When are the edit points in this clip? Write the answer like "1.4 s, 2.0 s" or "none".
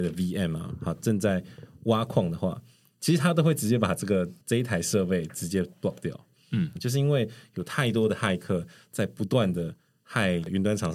4.4 s, 6.8 s